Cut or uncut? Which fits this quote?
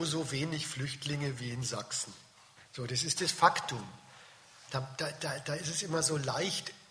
cut